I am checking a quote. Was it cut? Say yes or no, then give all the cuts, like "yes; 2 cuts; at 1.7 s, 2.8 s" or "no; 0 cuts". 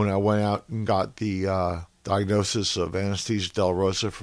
yes; 1 cut; at 1.9 s